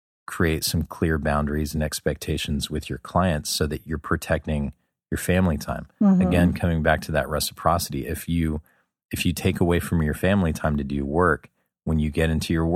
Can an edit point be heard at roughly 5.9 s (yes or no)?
no